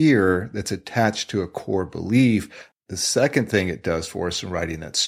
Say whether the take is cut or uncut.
cut